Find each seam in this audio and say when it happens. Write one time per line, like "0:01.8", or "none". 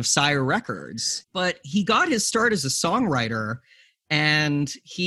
0:01.2